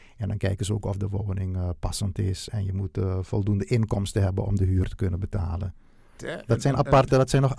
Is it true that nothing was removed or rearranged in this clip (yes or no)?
no